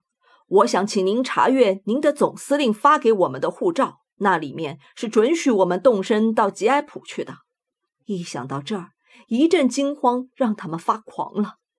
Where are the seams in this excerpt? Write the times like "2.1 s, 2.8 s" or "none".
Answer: 4.1 s, 7.9 s

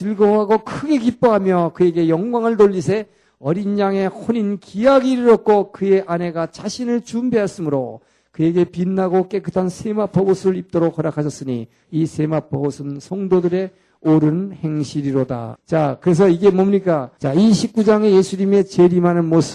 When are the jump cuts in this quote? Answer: 15.5 s, 17.2 s

